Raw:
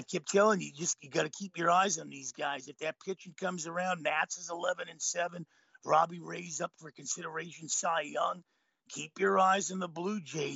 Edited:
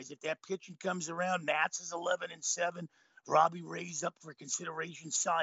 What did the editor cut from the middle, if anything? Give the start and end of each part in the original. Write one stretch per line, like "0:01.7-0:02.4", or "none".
none